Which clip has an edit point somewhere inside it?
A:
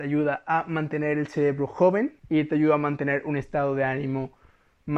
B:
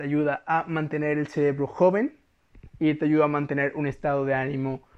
A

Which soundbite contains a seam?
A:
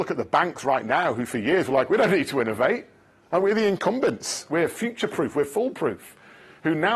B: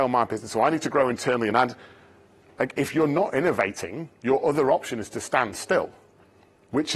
A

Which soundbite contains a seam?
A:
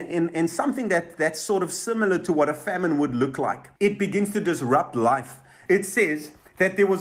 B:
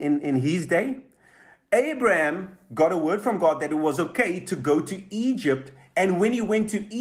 A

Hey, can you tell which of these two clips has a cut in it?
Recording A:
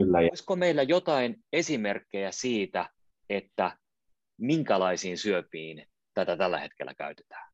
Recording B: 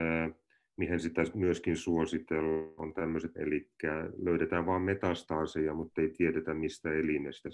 B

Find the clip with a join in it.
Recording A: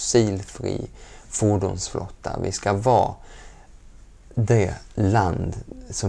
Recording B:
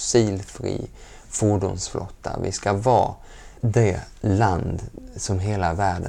B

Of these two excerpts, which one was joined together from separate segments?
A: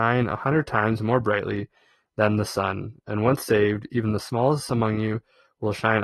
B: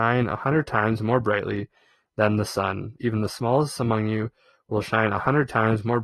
B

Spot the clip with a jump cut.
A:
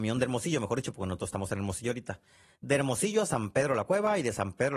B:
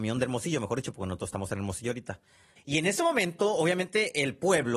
B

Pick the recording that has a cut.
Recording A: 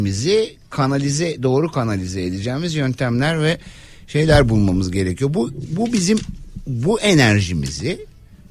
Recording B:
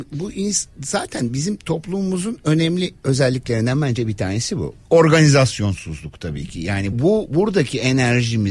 B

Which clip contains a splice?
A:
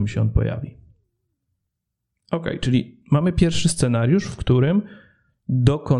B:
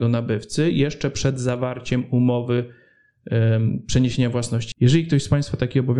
B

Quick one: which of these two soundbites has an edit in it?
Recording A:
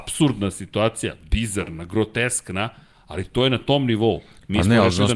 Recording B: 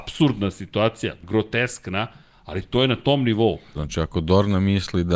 B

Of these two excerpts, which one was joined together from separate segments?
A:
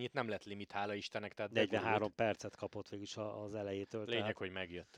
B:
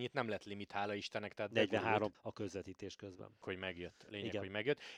B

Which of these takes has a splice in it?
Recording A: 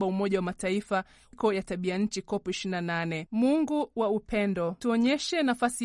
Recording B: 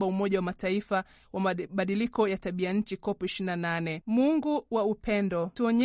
A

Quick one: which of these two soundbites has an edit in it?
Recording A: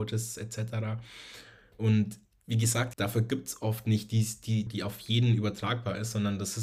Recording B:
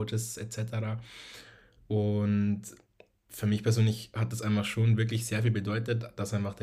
A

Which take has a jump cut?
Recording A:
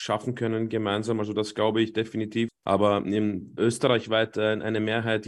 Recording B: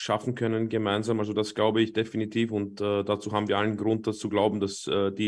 A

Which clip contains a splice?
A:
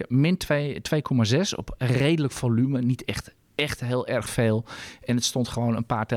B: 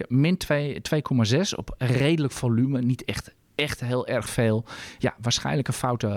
B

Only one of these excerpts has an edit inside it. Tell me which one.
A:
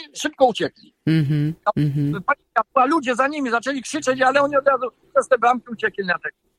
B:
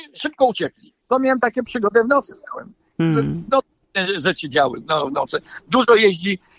B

